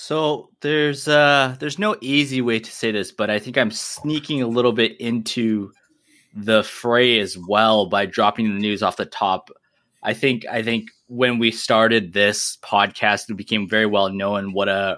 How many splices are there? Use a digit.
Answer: 0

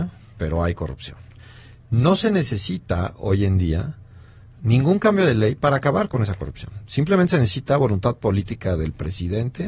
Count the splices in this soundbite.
0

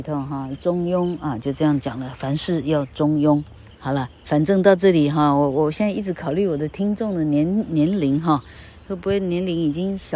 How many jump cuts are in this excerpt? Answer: 1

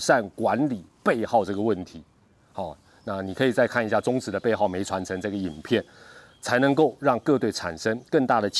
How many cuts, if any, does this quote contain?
0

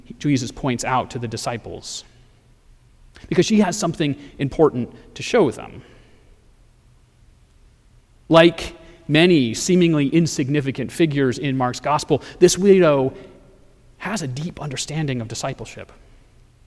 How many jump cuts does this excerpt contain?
0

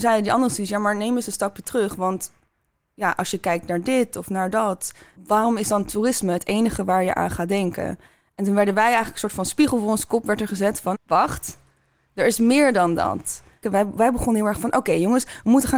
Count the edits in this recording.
3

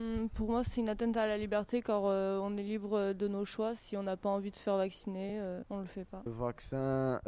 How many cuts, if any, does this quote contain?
0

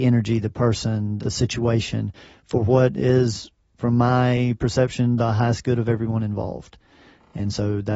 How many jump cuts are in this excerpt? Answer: 1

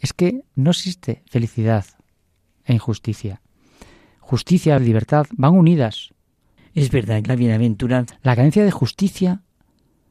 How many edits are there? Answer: 3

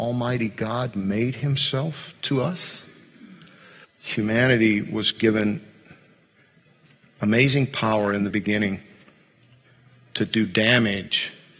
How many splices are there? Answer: 2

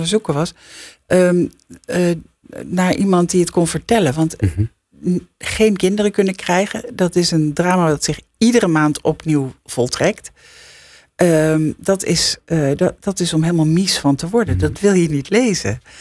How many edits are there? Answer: 0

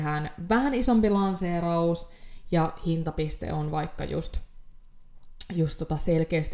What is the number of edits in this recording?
0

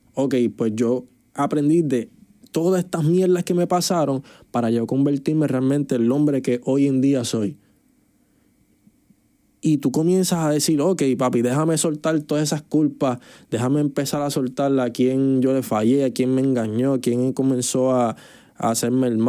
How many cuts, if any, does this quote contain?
0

